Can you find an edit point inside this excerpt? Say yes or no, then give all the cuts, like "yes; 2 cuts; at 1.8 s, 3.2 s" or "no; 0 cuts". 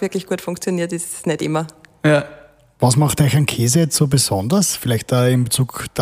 no; 0 cuts